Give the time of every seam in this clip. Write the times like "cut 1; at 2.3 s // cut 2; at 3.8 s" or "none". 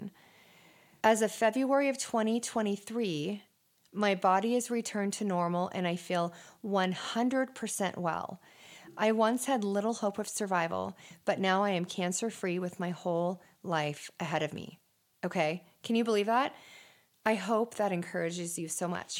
none

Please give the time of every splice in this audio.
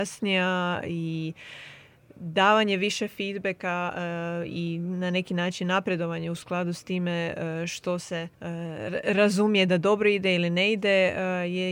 cut 1; at 8.3 s

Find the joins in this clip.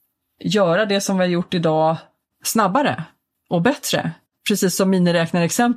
none

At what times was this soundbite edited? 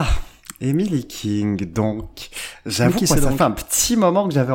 none

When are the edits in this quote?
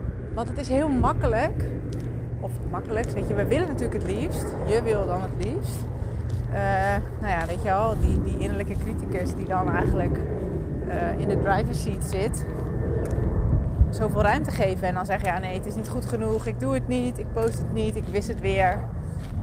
none

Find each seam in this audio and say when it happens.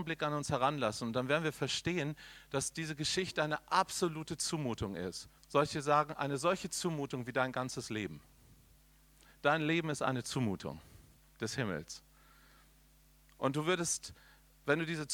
cut 1; at 5.4 s

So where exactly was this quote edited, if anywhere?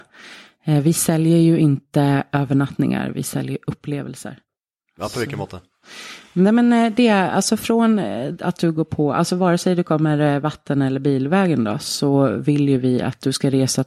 none

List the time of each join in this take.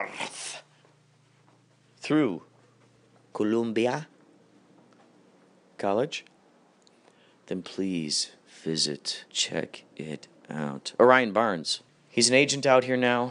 cut 1; at 9.3 s // cut 2; at 11.9 s

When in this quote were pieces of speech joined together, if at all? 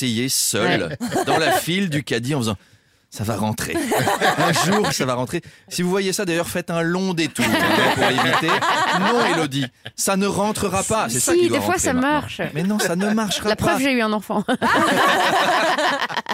cut 1; at 4.9 s

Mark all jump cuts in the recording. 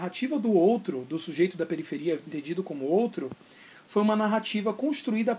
none

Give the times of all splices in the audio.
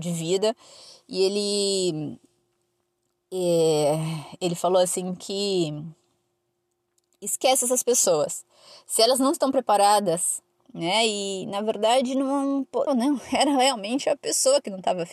cut 1; at 10.6 s // cut 2; at 12.9 s

